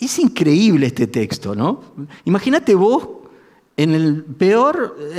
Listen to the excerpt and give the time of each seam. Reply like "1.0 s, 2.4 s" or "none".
none